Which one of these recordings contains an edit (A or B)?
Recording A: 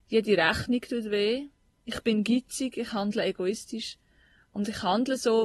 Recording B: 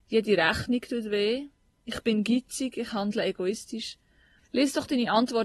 B